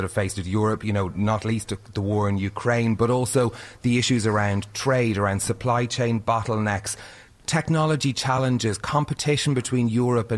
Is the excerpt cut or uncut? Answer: uncut